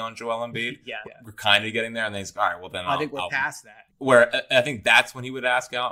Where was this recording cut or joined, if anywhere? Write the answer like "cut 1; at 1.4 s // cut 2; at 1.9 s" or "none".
cut 1; at 1.0 s // cut 2; at 3.9 s